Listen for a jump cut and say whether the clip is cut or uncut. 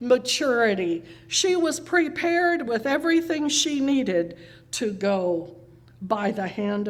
uncut